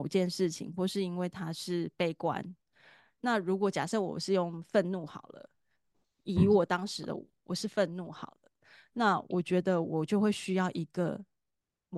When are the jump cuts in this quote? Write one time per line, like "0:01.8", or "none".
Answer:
none